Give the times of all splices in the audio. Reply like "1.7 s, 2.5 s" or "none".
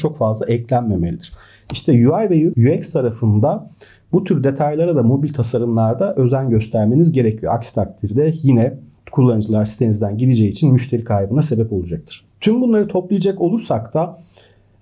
2.5 s